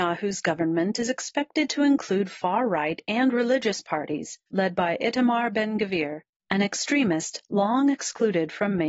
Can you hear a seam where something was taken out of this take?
yes; 1 cut; at 4.5 s

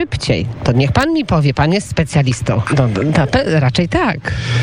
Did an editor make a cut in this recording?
yes; 1 cut; at 2.7 s

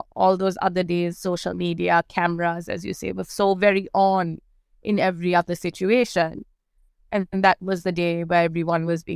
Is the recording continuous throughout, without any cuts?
yes; 0 cuts

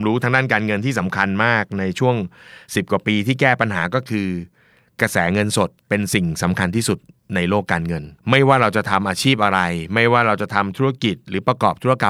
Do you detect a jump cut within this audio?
yes; 2 cuts; at 5.8 s, 8.2 s

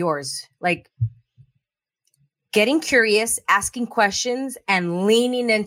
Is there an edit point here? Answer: no; 0 cuts

